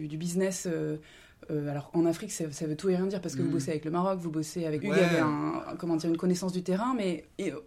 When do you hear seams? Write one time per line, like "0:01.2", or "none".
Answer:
0:04.8